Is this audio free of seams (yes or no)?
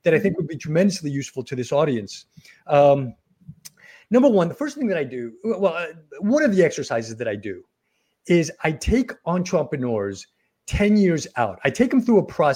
yes